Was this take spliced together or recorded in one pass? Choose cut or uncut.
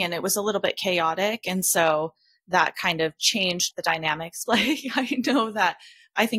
cut